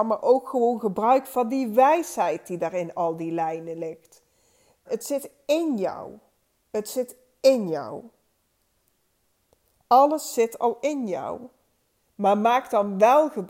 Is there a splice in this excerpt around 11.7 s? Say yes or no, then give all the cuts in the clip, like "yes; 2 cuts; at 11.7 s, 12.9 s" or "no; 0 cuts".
no; 1 cut; at 4.9 s